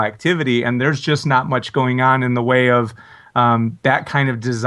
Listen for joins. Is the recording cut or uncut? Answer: uncut